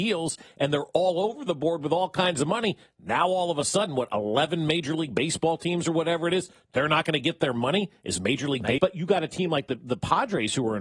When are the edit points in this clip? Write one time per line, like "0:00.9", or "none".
0:08.8